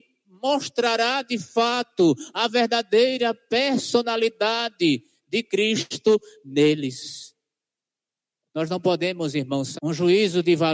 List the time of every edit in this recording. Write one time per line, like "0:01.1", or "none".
0:09.7